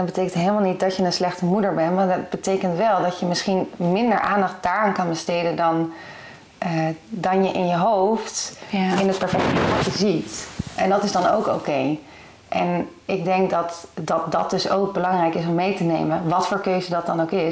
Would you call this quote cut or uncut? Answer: uncut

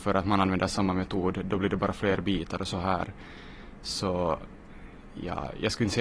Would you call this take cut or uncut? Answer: uncut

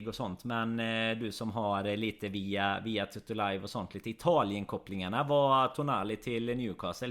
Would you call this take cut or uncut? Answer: uncut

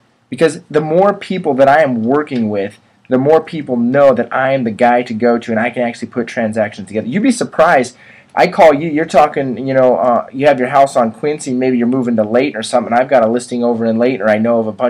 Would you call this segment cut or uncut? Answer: uncut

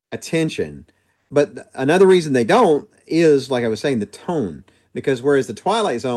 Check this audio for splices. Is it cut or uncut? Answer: uncut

